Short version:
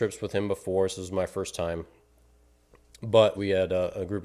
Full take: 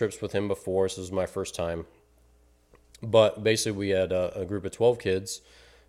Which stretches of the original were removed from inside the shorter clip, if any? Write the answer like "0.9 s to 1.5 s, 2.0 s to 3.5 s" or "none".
3.3 s to 3.7 s